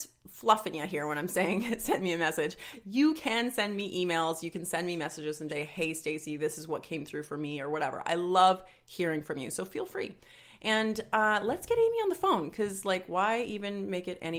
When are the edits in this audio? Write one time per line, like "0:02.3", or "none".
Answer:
0:05.5